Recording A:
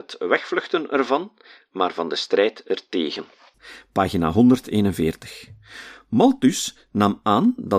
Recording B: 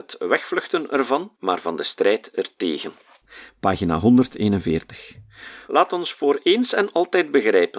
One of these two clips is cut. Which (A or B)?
B